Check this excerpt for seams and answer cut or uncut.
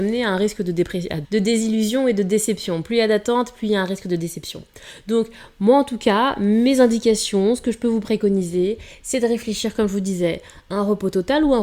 cut